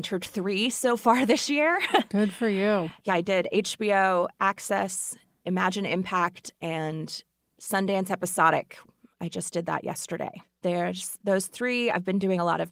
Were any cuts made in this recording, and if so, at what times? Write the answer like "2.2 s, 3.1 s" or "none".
none